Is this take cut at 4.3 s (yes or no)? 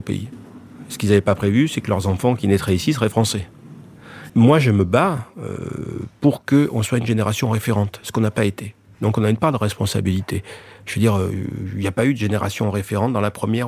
yes